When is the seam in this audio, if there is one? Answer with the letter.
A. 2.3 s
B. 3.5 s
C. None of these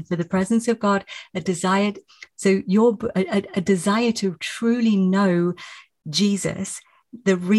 C